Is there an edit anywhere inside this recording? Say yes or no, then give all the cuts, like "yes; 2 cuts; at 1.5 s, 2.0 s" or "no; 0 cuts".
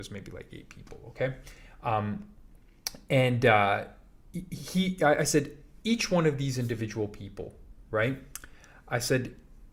no; 0 cuts